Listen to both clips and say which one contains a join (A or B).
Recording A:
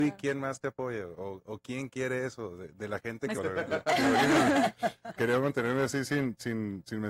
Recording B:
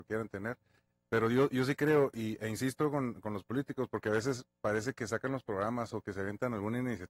A